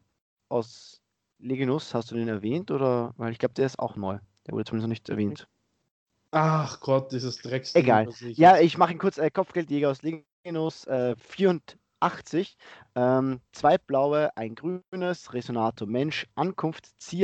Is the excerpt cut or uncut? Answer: uncut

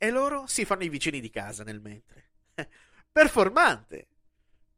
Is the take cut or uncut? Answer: uncut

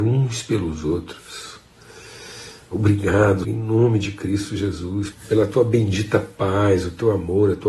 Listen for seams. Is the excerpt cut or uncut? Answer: cut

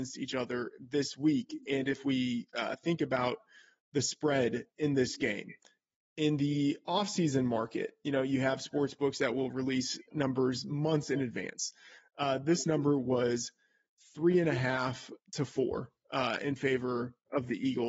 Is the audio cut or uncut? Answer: cut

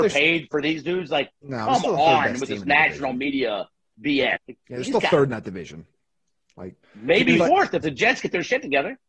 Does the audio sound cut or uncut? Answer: cut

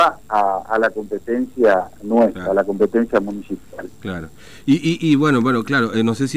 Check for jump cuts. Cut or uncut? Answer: uncut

